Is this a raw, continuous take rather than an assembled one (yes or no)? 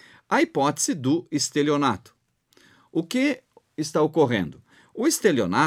yes